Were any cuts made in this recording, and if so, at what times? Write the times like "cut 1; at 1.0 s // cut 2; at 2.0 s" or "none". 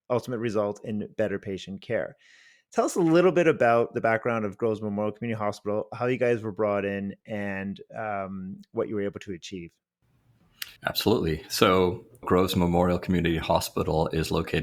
cut 1; at 10.8 s // cut 2; at 12.2 s

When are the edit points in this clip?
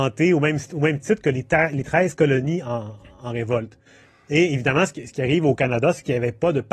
none

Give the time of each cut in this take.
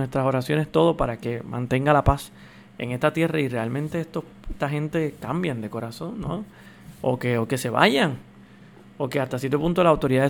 none

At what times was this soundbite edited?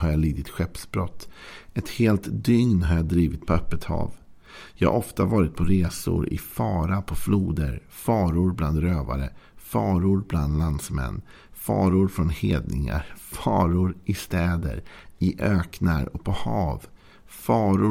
none

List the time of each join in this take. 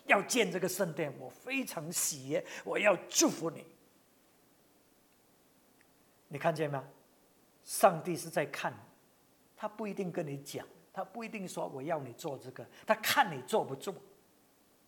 none

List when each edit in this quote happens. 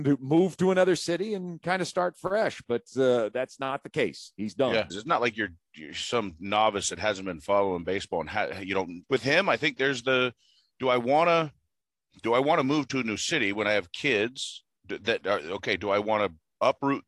cut 1; at 4.9 s // cut 2; at 9.0 s

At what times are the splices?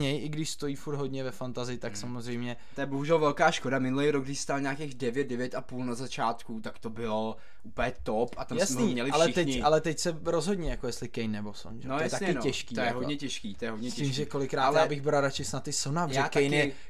none

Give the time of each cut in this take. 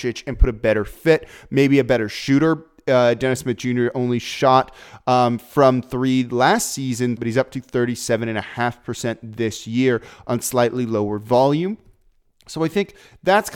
cut 1; at 7.2 s

